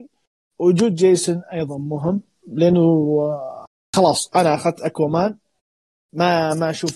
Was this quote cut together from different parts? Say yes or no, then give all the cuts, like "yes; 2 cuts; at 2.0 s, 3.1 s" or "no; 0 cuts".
no; 0 cuts